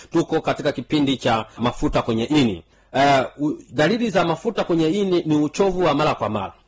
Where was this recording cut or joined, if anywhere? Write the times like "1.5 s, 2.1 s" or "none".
1.6 s